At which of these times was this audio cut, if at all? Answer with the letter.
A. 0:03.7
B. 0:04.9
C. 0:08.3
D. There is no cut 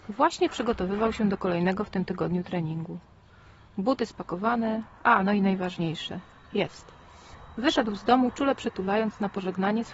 B